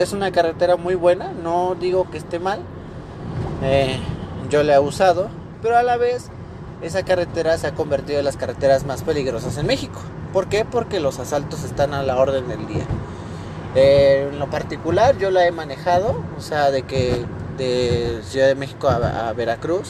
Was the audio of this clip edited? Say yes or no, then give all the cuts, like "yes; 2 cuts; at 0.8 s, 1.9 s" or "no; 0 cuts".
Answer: no; 0 cuts